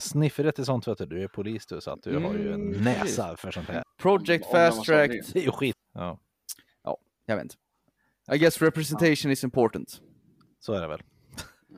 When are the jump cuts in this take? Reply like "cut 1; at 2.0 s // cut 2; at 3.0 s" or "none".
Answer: cut 1; at 3.8 s // cut 2; at 5.7 s

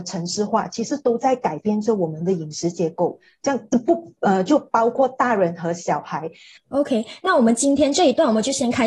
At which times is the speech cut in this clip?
cut 1; at 6.6 s

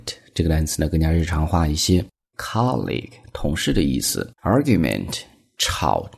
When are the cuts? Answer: cut 1; at 2.3 s // cut 2; at 4.4 s

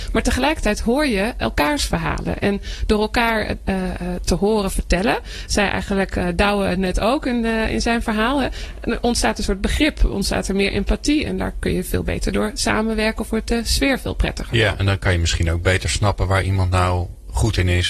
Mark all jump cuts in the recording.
none

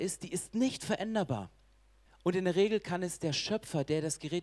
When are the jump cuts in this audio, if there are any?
cut 1; at 2.1 s

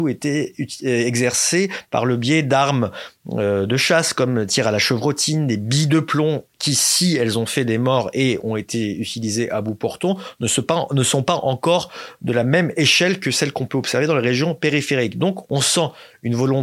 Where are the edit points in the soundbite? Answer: none

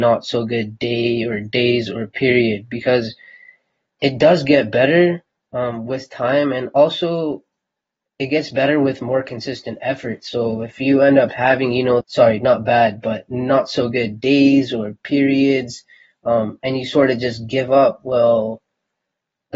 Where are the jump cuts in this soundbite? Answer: cut 1; at 12.0 s

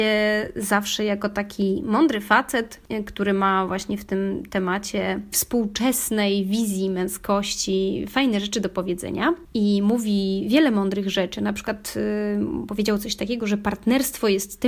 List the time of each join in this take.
none

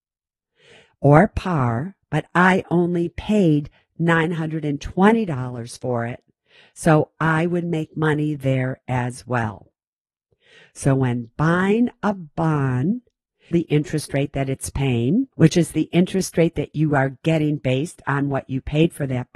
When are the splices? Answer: cut 1; at 13.5 s // cut 2; at 15.3 s

